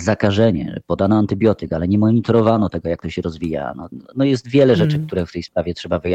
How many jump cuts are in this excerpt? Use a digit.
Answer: 1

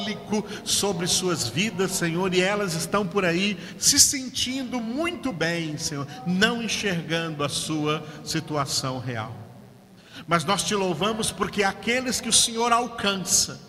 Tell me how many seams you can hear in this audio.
0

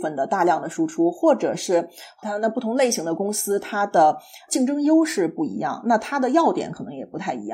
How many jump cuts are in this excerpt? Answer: 1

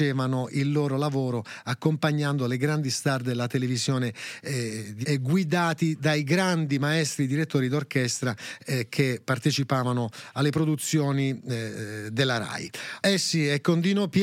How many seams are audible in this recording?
2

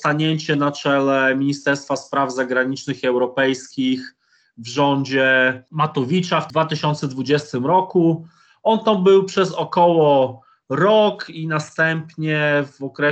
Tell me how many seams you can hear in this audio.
0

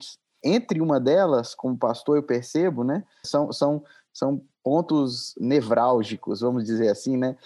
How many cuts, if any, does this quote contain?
1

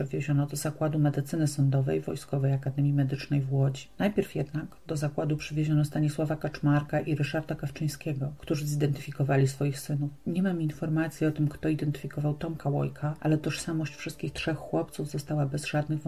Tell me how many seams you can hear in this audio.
0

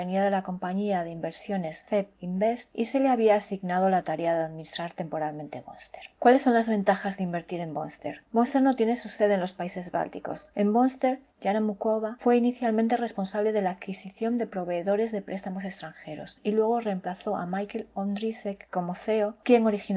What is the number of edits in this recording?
1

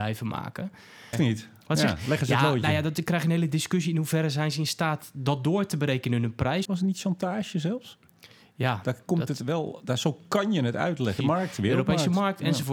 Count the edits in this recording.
3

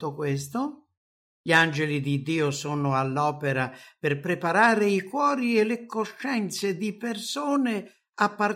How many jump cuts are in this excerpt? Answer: 1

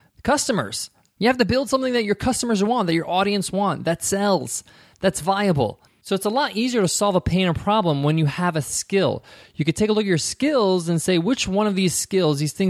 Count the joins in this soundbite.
1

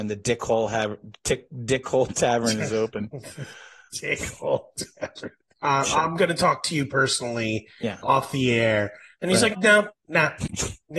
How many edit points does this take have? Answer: 2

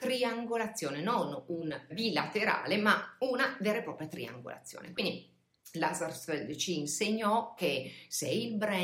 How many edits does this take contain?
1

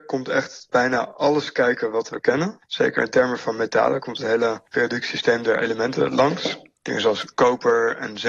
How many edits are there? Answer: 0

